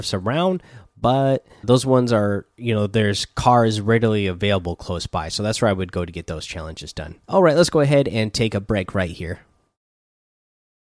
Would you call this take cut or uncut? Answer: cut